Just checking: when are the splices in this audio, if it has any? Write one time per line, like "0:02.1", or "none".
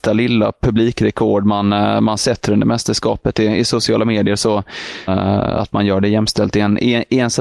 0:05.1